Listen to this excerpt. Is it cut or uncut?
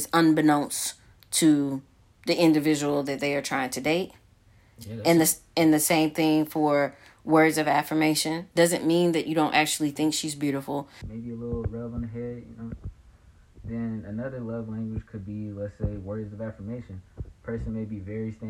cut